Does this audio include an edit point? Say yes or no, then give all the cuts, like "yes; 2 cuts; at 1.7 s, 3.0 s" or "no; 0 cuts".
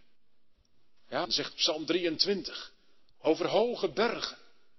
yes; 1 cut; at 1.2 s